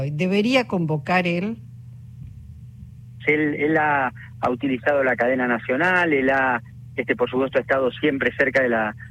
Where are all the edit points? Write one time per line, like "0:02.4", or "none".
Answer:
0:03.2